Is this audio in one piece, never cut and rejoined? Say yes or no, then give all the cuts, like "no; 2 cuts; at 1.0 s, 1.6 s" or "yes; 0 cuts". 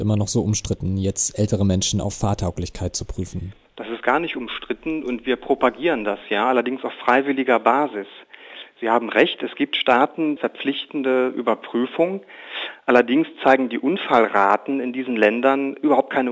no; 1 cut; at 10.4 s